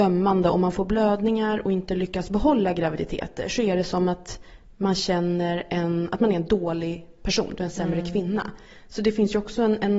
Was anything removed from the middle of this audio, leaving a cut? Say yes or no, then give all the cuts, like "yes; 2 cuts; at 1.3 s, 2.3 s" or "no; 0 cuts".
no; 0 cuts